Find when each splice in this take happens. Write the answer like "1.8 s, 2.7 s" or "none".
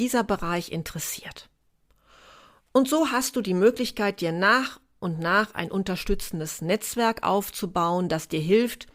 none

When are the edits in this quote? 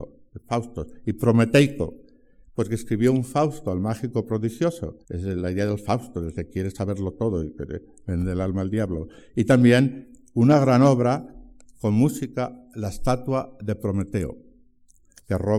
5.0 s

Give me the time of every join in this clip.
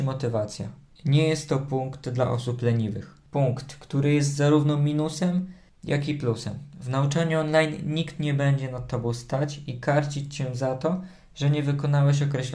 none

